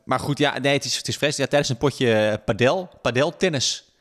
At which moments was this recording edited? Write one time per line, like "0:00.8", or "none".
none